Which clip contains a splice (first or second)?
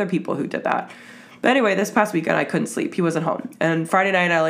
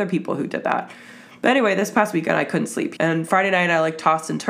second